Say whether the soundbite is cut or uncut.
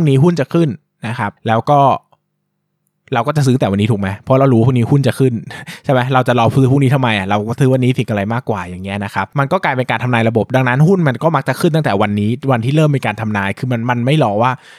uncut